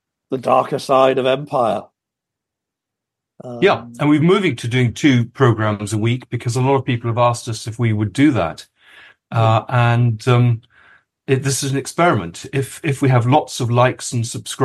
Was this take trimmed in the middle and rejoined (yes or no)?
no